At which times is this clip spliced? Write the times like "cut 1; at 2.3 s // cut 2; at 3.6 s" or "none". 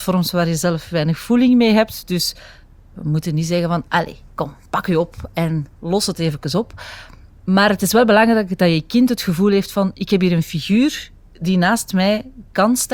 none